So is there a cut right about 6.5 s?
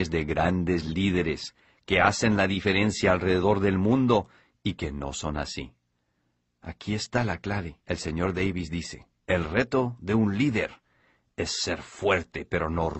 no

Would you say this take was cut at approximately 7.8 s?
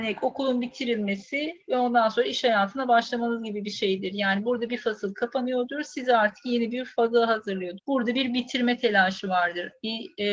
yes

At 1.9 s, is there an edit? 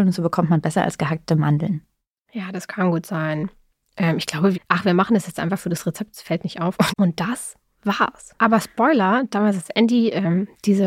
no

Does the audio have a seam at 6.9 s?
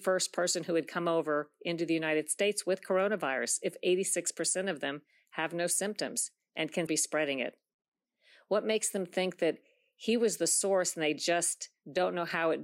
yes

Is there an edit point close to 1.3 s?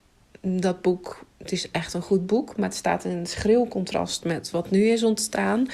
yes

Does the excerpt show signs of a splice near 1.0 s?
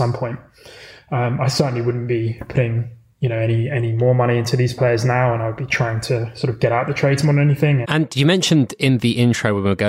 no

